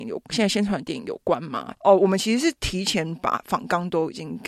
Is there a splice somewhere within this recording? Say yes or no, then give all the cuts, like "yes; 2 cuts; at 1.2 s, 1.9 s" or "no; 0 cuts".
yes; 1 cut; at 1.7 s